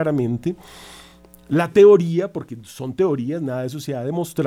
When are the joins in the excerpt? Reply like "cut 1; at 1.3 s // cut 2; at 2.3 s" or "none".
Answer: none